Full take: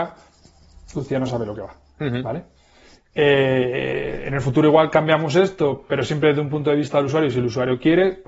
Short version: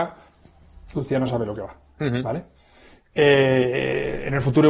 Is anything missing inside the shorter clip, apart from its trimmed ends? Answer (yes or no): no